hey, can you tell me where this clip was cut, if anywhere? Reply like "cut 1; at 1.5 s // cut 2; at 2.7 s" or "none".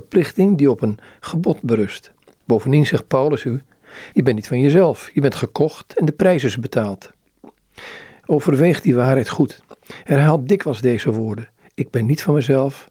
cut 1; at 8.2 s